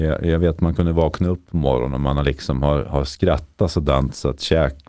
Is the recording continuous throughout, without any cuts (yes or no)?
yes